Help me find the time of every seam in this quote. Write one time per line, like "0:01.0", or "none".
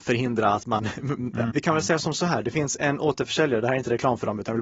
0:01.5